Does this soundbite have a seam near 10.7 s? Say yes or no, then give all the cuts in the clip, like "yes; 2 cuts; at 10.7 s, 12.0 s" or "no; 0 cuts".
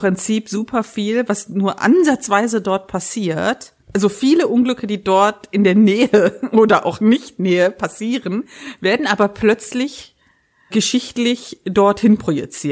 yes; 1 cut; at 10.7 s